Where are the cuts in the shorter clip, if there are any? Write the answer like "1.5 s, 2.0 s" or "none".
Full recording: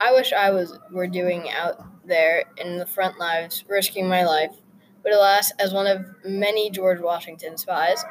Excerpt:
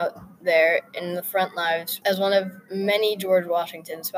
2.0 s